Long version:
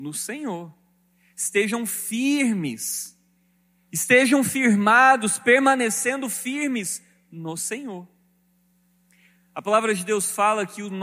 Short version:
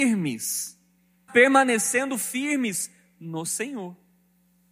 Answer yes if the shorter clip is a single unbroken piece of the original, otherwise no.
no